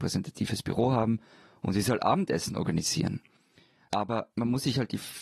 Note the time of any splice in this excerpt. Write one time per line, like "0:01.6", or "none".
none